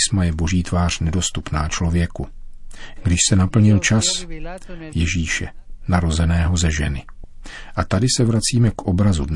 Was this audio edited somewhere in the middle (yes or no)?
yes